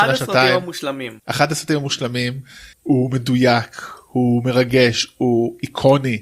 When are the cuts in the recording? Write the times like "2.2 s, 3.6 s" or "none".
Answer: 1.2 s, 2.7 s